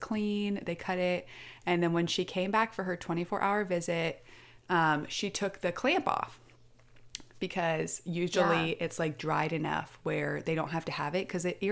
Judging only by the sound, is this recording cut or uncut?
uncut